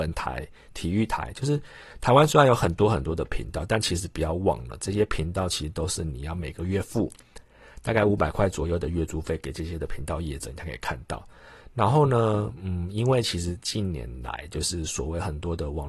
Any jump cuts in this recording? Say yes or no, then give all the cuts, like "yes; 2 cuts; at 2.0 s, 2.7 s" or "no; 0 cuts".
no; 0 cuts